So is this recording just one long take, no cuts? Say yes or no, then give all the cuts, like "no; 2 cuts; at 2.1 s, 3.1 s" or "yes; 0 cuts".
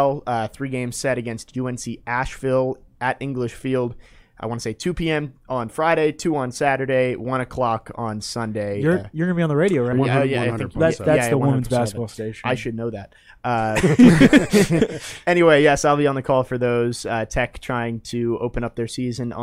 no; 1 cut; at 9.9 s